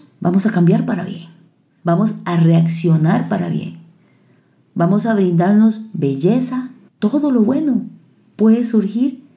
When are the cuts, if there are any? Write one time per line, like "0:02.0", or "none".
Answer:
0:06.9